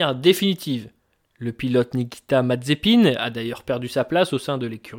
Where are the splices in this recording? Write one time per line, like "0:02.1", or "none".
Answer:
none